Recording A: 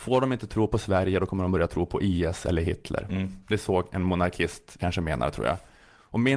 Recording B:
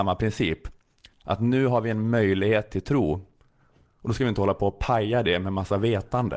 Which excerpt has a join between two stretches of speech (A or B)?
A